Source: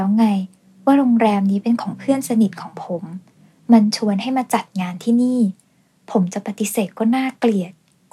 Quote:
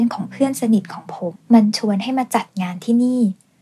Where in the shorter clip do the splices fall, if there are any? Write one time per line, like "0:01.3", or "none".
0:01.3

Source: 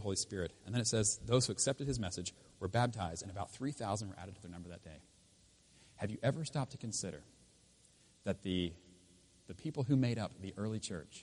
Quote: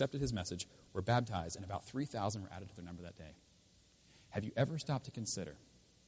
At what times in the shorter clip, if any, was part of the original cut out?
none

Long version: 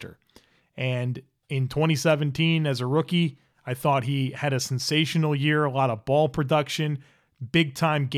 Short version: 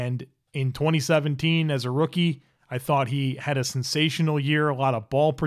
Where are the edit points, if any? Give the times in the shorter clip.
none

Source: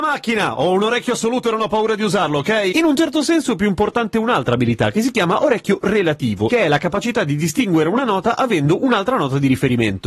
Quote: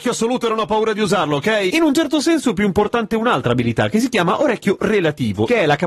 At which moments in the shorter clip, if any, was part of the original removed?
none

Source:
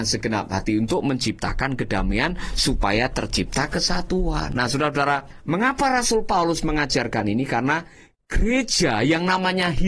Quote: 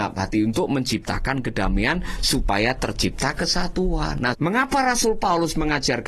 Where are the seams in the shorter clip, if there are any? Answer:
0:04.3

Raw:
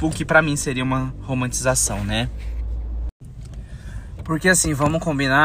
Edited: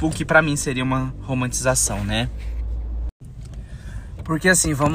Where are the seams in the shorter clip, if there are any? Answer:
none

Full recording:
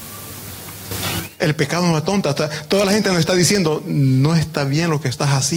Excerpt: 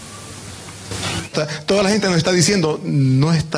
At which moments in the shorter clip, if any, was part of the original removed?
0:01.3

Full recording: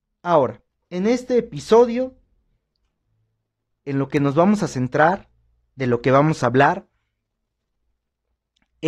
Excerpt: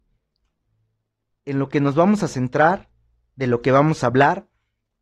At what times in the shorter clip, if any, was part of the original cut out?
none

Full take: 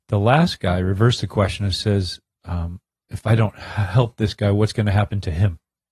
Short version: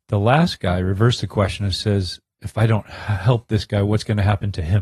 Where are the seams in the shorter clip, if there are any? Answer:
0:02.3

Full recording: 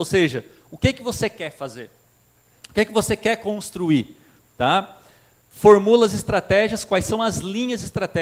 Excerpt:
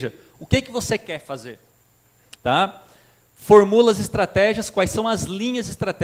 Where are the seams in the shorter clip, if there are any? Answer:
0:02.4

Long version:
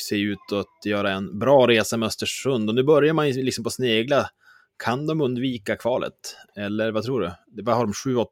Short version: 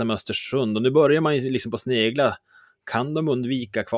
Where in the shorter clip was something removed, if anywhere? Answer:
none

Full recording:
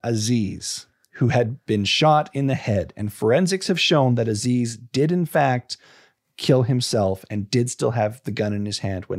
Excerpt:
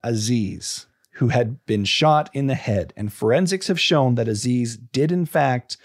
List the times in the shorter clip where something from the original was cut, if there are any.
none

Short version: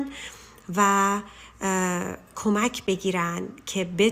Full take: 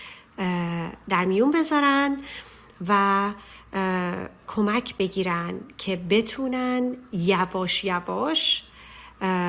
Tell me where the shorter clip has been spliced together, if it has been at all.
none

